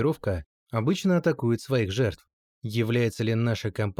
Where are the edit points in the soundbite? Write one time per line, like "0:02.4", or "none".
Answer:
0:02.4